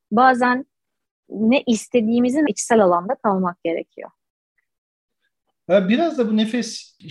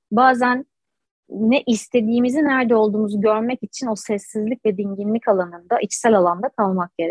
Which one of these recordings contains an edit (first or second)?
first